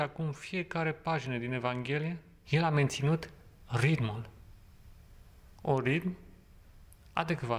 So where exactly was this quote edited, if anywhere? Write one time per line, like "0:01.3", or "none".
0:02.4